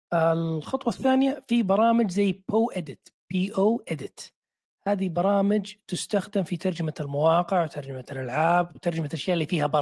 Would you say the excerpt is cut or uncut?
uncut